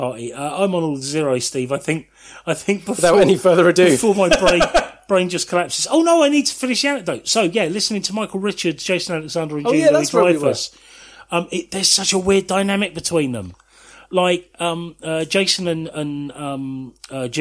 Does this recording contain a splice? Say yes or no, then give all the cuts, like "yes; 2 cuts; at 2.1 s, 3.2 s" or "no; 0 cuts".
no; 0 cuts